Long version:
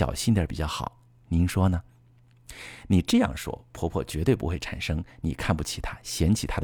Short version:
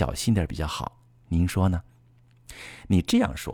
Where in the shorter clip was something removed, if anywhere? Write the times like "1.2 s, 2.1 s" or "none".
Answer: none